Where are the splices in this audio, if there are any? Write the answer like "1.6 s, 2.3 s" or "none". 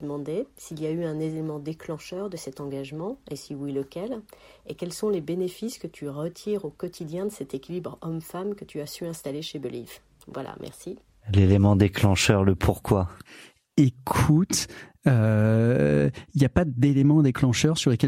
none